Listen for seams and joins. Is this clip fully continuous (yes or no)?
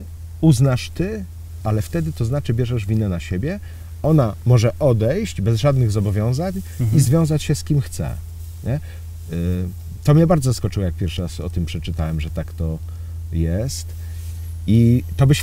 no